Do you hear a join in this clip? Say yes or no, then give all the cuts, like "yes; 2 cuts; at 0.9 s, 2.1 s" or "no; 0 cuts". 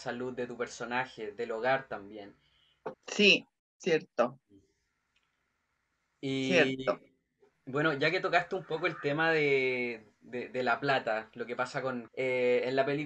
yes; 2 cuts; at 2.9 s, 12.1 s